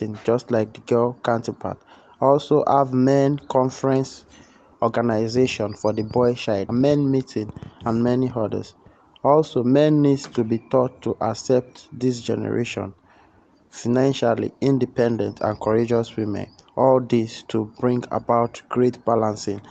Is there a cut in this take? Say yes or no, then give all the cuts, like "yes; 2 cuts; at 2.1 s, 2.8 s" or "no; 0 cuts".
yes; 1 cut; at 6.7 s